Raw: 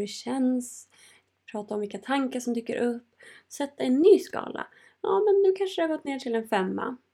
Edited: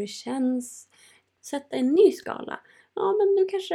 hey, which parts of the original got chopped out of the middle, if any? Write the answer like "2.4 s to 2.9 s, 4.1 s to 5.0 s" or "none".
1.4 s to 3.4 s